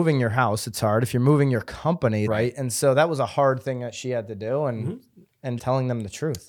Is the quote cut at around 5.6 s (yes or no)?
yes